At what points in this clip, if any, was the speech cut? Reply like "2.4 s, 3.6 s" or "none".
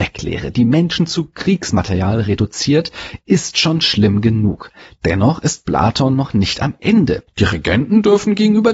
7.3 s